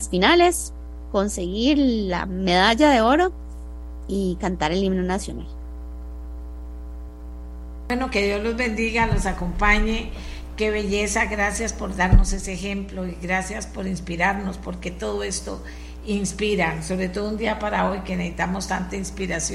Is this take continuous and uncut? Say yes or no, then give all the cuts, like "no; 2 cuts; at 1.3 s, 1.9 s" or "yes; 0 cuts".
yes; 0 cuts